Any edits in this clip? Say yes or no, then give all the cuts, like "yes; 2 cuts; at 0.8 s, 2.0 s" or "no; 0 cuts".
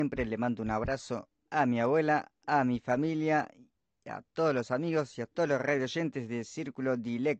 no; 0 cuts